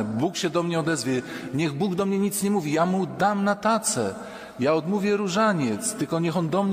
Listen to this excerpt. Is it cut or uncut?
uncut